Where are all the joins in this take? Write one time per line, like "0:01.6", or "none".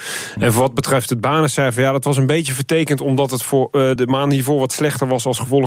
0:04.0